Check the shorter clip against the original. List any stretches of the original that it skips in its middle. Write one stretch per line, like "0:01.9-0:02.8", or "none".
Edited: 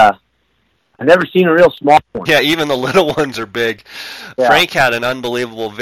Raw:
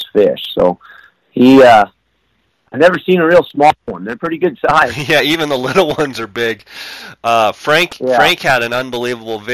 0:04.0-0:05.1
0:07.2-0:08.1